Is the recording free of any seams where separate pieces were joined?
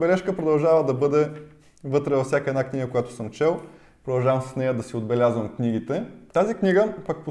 yes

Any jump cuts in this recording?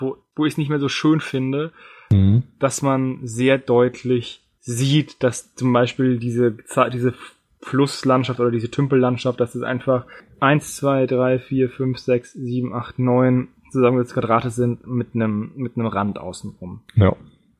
no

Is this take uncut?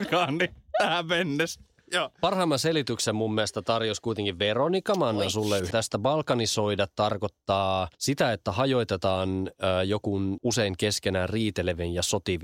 no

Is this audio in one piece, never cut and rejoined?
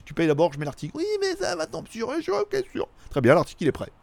yes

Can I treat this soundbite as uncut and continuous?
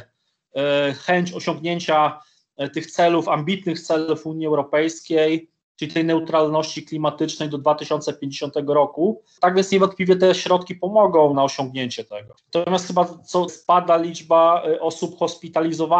no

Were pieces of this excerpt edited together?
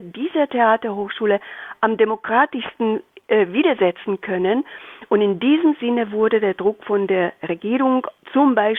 yes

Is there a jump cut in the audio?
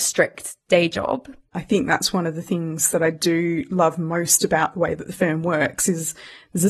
yes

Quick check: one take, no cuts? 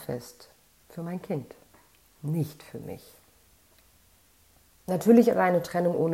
yes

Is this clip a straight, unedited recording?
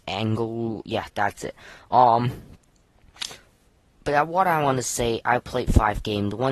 yes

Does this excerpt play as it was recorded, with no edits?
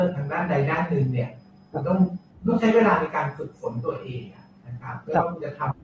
yes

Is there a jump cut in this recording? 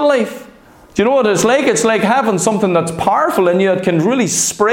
no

